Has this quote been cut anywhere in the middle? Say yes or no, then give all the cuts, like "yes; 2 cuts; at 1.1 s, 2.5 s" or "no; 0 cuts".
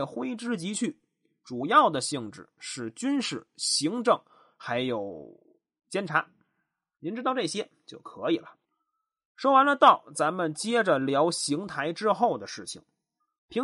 no; 0 cuts